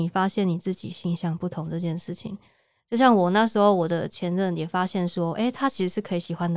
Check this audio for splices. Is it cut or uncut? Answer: uncut